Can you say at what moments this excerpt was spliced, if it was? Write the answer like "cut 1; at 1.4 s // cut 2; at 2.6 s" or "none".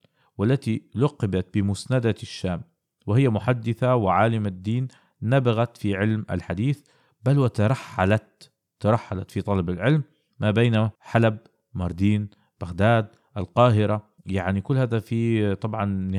cut 1; at 11.0 s // cut 2; at 14.2 s

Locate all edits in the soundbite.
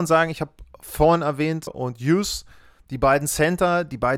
cut 1; at 1.7 s

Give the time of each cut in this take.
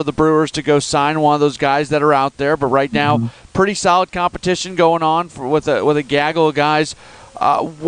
none

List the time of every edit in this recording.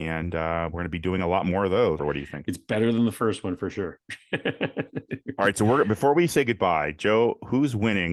cut 1; at 2.0 s

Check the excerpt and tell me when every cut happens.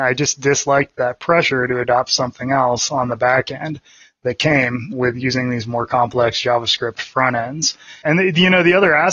cut 1; at 8.0 s

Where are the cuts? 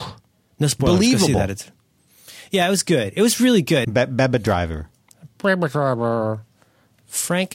cut 1; at 3.8 s

